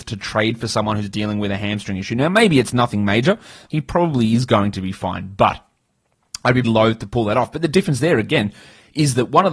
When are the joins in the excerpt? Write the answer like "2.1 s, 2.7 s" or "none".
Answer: 3.7 s, 6.6 s